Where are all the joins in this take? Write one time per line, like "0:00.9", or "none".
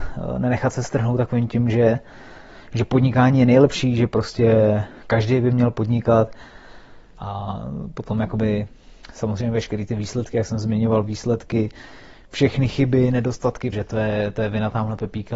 0:07.1
0:13.7